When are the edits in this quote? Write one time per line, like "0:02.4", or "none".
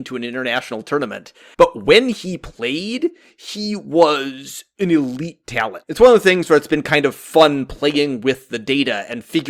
0:01.5
0:05.8